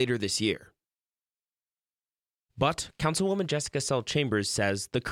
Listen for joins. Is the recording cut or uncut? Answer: cut